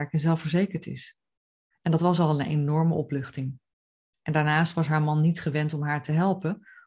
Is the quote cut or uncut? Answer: cut